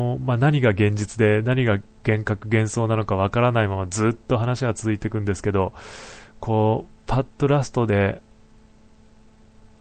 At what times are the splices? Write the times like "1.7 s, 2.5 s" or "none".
none